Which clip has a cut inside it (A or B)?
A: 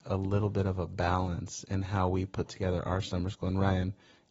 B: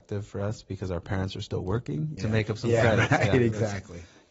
B